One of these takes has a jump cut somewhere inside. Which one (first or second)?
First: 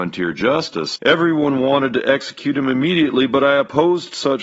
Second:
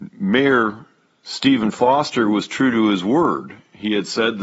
first